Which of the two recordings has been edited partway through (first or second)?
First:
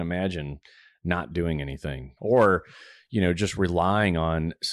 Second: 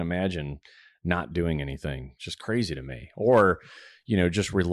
first